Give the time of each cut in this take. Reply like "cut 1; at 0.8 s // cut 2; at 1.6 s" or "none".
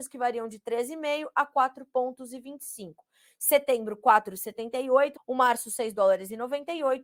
cut 1; at 5.2 s